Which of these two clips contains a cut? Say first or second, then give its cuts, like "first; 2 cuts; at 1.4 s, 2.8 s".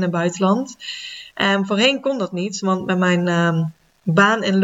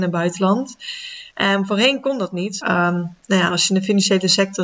second; 1 cut; at 2.6 s